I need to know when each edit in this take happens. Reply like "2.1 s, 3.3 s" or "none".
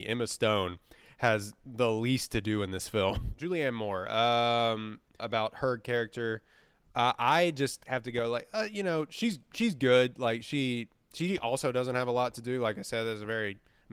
5.2 s